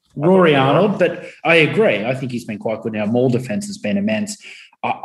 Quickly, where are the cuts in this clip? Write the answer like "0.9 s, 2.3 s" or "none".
none

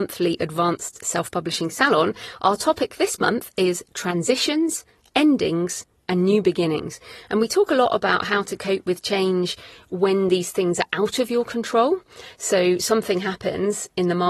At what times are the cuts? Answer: none

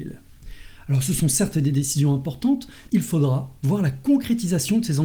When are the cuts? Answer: 2.9 s

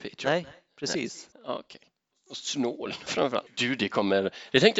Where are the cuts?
1.3 s, 3.5 s

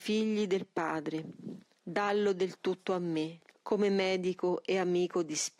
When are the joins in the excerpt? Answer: 1.8 s, 3.5 s

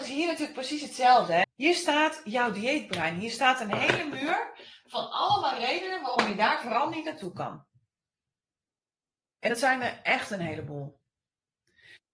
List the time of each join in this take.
1.4 s

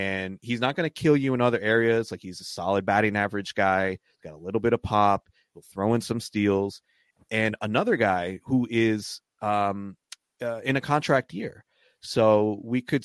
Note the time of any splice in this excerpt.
none

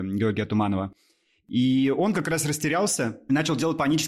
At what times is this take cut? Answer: none

